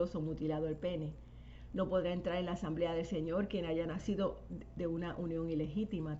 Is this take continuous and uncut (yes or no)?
yes